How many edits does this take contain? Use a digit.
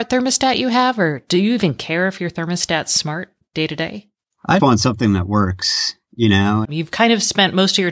2